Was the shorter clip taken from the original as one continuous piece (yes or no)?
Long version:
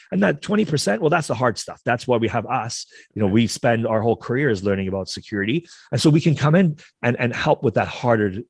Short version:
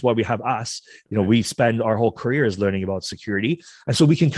yes